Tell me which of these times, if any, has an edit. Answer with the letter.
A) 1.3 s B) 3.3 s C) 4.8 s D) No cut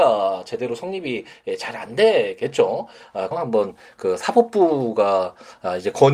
B